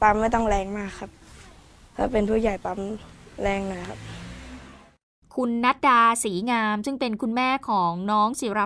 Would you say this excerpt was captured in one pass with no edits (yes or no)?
no